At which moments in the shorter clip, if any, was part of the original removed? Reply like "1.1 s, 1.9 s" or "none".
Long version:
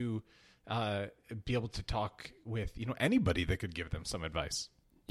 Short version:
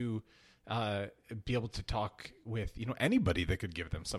none